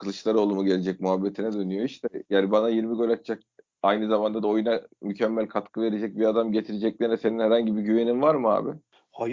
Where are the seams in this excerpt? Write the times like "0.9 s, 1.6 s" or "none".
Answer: none